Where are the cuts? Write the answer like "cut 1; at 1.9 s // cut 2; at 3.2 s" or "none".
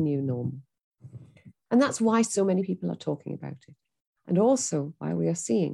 cut 1; at 1.7 s